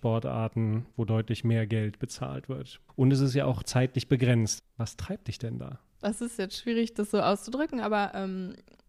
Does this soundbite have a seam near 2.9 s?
yes; 2 cuts; at 2.9 s, 4.6 s

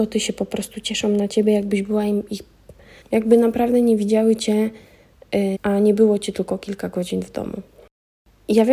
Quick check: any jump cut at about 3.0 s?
yes; 2 cuts; at 3.0 s, 5.5 s

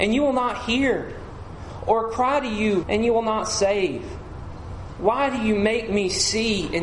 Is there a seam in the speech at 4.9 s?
no; 1 cut; at 2.8 s

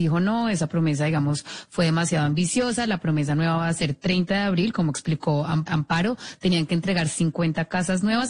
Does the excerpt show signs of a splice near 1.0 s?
no; 1 cut; at 5.7 s

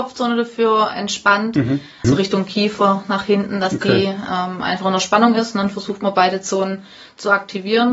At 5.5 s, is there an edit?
no; 1 cut; at 2.0 s

